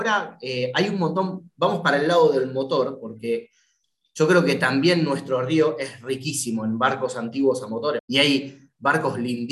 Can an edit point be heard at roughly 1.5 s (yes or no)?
no